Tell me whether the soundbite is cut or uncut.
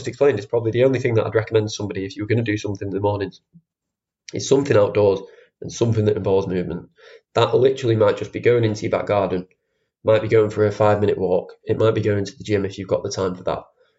uncut